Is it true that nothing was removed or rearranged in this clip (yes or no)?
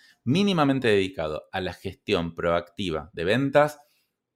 yes